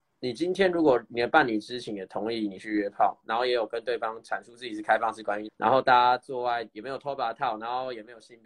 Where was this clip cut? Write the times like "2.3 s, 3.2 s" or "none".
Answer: 3.2 s, 5.5 s